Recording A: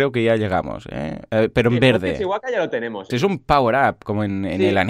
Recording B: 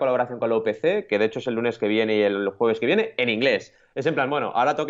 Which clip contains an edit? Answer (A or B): A